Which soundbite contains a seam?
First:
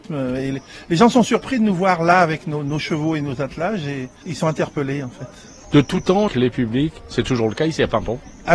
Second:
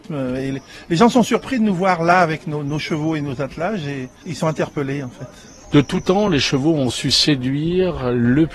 first; 1 cut; at 6.3 s

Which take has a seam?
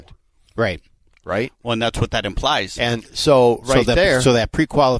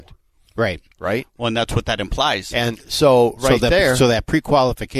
second; 1 cut; at 0.9 s

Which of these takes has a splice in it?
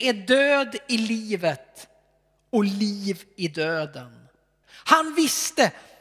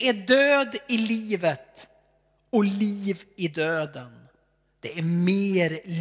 first; 1 cut; at 4.6 s

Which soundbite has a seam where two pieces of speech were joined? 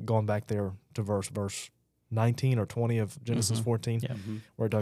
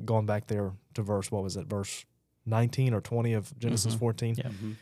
first; 1 cut; at 1.3 s

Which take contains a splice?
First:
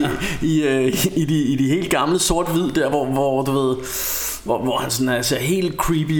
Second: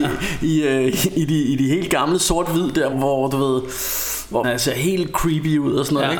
second; 2 cuts; at 2.9 s, 4.4 s

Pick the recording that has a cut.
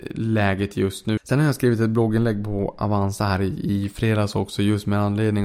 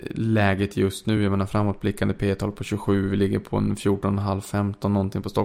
first; 1 cut; at 1.2 s

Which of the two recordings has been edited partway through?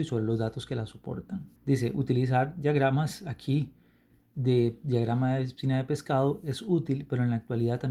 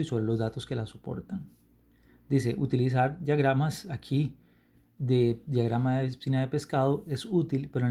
first; 1 cut; at 1.6 s

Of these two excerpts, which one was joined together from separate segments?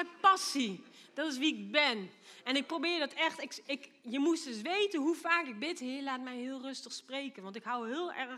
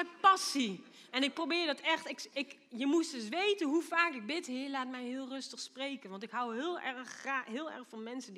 second; 1 cut; at 1.1 s

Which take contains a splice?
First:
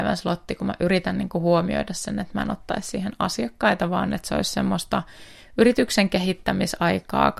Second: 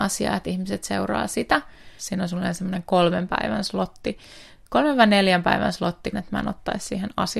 second; 2 cuts; at 2.0 s, 6.1 s

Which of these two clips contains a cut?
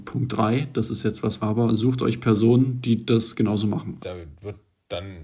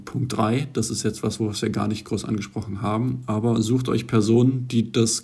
first; 2 cuts; at 1.4 s, 4.0 s

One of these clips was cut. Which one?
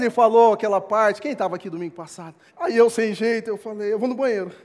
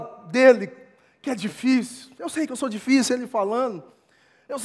first; 1 cut; at 2.5 s

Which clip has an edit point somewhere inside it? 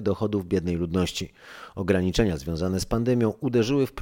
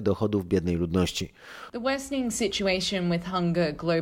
second; 1 cut; at 1.7 s

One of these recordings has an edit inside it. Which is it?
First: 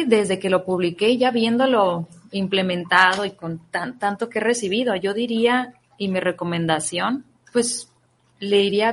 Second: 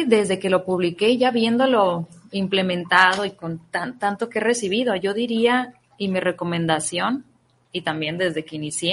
first; 1 cut; at 7.4 s

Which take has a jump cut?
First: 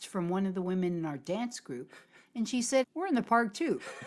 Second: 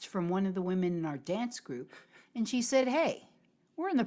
first; 1 cut; at 2.8 s

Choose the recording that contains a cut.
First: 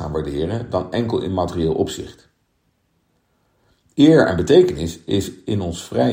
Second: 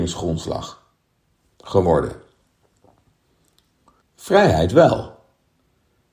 second; 1 cut; at 4.0 s

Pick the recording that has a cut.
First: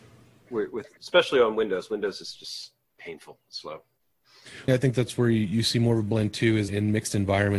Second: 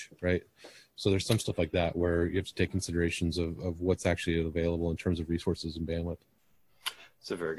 first; 3 cuts; at 1.0 s, 4.7 s, 6.7 s

